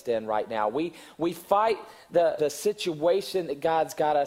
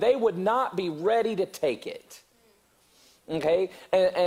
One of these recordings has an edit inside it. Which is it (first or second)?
first